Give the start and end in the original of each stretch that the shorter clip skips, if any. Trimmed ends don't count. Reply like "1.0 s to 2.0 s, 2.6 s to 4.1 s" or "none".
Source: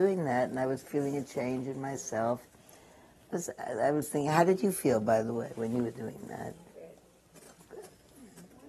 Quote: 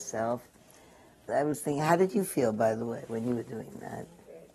3.3 s to 3.8 s